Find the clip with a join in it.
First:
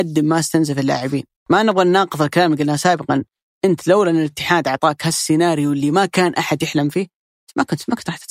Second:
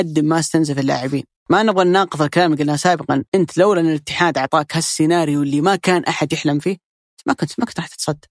second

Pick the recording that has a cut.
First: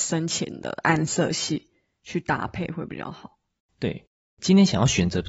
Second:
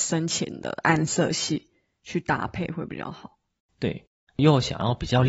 second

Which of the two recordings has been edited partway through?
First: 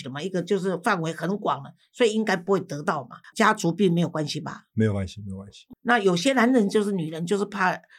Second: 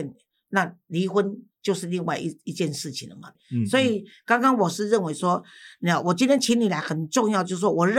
first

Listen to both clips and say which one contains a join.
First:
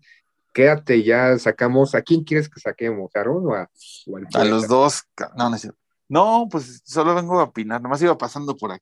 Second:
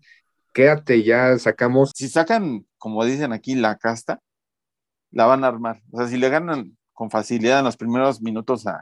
second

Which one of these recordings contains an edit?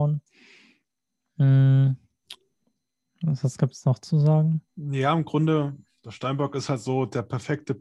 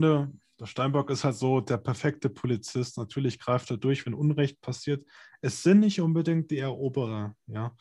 first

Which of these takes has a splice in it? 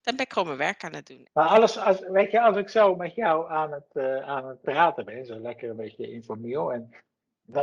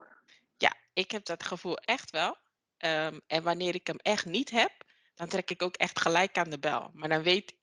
first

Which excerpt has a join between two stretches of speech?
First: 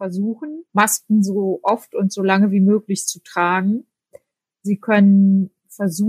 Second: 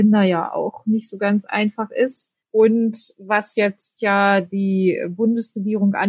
second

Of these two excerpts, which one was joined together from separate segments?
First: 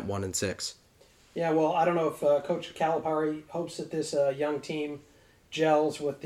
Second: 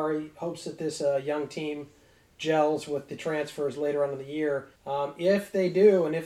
second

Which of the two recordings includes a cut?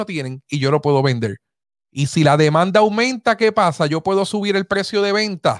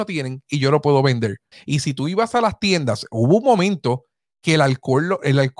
second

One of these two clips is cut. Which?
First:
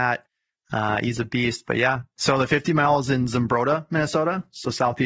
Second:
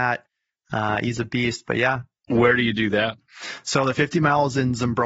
first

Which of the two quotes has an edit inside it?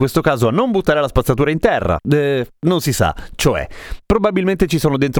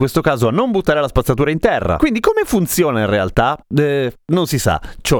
first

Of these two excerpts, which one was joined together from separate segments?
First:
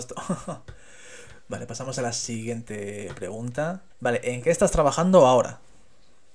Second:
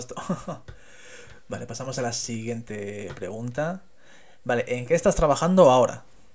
first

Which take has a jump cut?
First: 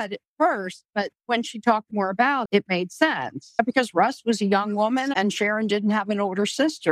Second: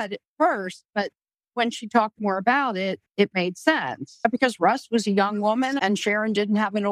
first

